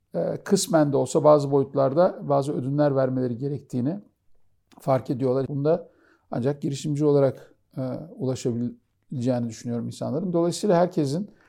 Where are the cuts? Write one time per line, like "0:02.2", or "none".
0:05.5